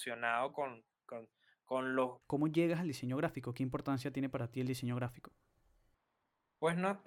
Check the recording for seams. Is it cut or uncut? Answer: cut